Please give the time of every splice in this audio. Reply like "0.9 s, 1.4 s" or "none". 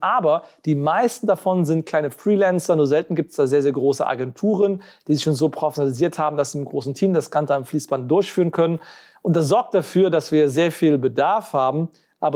none